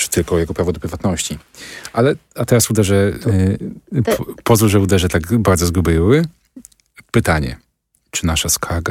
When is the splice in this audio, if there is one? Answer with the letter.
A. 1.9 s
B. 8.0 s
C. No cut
B